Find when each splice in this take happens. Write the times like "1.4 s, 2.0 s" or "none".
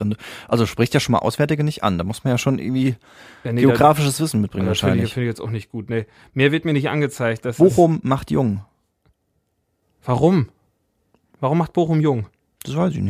9.8 s